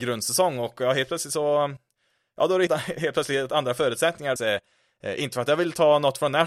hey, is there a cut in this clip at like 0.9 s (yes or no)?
no